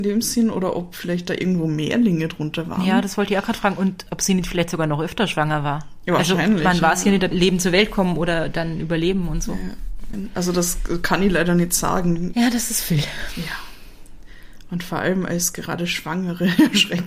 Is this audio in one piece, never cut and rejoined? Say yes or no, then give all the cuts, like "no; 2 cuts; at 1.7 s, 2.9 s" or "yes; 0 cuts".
no; 3 cuts; at 7.3 s, 10.1 s, 12.3 s